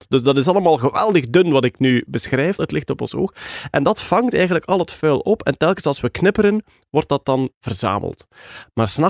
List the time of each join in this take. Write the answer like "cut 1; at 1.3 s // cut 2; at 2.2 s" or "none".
cut 1; at 2.6 s